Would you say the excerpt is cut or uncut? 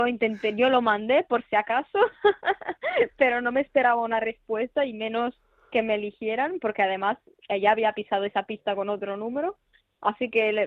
uncut